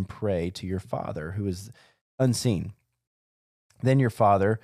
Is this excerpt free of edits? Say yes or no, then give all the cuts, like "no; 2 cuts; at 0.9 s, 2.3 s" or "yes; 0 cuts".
yes; 0 cuts